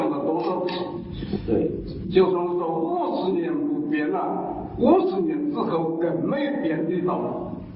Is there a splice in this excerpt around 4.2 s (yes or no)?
no